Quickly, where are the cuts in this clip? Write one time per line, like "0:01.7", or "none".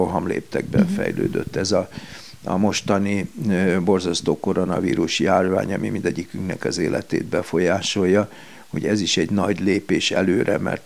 none